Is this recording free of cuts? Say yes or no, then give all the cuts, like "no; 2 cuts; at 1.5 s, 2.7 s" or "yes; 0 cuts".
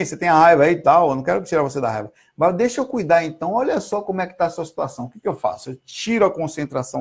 yes; 0 cuts